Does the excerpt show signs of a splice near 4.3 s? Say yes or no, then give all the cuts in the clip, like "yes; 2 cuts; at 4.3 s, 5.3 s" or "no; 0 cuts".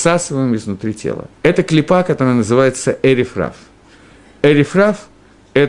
no; 1 cut; at 1.3 s